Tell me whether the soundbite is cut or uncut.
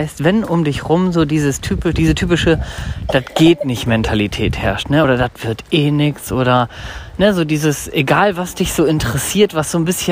uncut